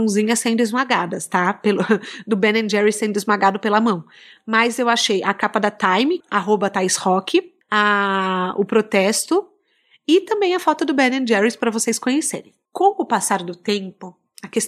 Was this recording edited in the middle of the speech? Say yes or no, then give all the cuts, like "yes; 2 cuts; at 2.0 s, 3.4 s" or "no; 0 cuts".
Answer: yes; 1 cut; at 6.2 s